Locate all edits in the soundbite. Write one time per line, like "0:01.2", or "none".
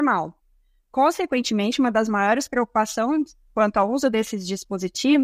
none